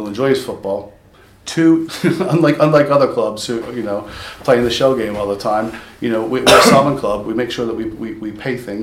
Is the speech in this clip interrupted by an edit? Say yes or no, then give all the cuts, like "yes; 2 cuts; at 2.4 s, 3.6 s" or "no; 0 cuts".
yes; 2 cuts; at 1.9 s, 3.6 s